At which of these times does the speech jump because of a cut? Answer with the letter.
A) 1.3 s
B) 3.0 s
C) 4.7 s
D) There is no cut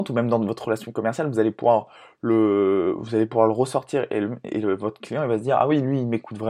D